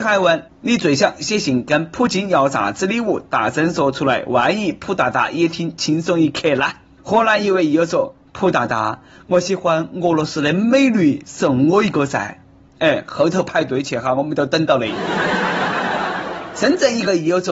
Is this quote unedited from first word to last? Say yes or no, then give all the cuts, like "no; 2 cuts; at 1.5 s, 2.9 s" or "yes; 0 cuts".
yes; 0 cuts